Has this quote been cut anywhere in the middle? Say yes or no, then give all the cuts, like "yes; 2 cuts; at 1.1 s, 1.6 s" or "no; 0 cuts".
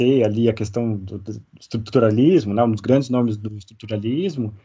no; 0 cuts